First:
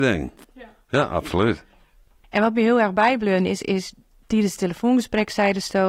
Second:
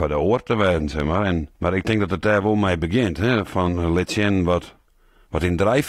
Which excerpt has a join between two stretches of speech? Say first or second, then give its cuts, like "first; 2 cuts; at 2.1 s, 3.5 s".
second; 1 cut; at 1.5 s